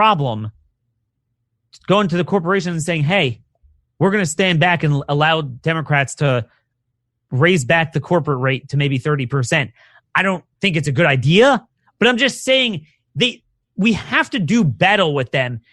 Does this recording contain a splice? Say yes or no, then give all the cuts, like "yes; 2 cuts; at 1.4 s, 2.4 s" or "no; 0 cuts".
no; 0 cuts